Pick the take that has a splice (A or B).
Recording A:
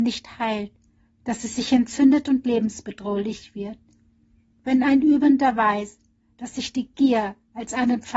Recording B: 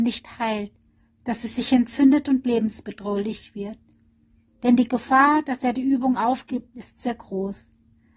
B